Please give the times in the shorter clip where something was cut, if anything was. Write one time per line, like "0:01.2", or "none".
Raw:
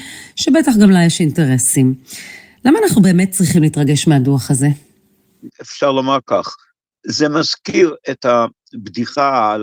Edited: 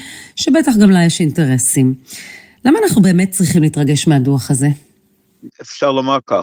none

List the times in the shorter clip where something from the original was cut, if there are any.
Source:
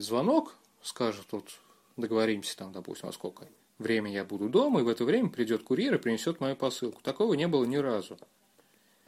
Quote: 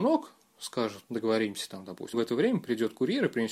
0:01.0
0:02.1

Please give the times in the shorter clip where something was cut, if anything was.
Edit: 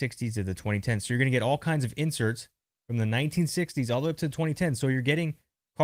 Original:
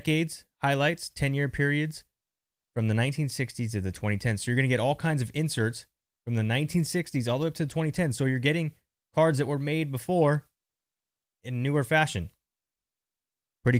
none

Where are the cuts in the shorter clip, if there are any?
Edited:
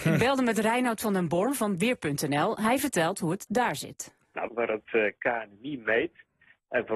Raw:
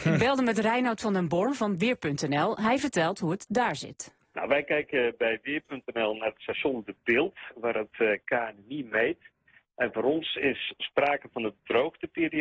0:04.5

